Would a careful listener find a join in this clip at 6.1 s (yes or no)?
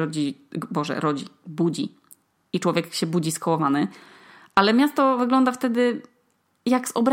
no